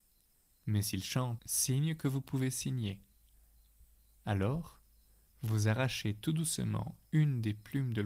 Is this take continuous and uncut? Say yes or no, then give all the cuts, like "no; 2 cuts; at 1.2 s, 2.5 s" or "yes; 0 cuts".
no; 1 cut; at 1.4 s